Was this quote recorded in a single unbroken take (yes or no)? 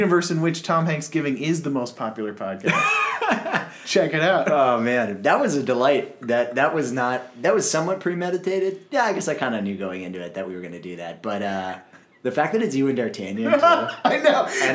yes